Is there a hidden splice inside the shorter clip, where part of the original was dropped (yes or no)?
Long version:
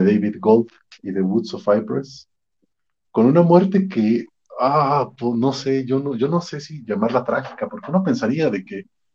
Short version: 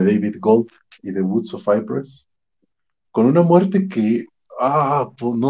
no